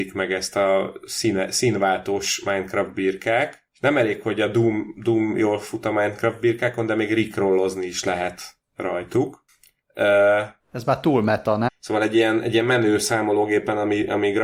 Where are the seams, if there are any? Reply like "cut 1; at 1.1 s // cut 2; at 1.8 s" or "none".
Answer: cut 1; at 10.6 s // cut 2; at 11.7 s

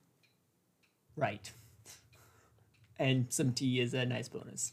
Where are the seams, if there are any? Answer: cut 1; at 1.1 s

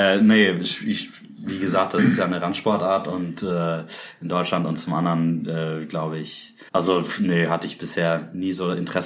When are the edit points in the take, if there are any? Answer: cut 1; at 6.7 s

